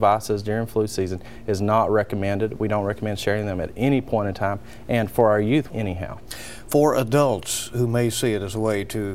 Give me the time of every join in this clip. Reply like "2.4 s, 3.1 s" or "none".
5.7 s